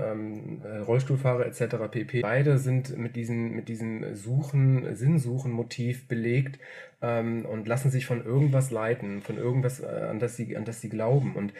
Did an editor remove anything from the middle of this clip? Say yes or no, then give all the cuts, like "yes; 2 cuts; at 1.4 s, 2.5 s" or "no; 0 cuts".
yes; 1 cut; at 2.2 s